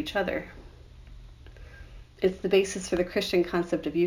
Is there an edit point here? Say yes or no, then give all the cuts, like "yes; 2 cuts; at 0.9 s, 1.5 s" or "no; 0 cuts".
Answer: yes; 1 cut; at 2.0 s